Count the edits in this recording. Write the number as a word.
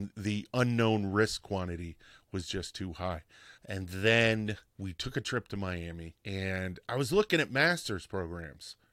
three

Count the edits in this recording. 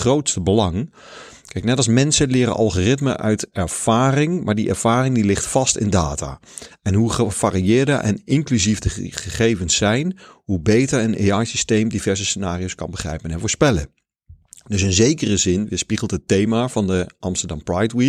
zero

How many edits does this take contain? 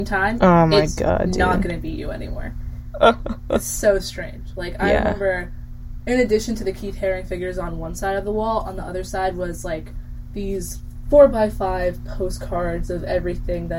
zero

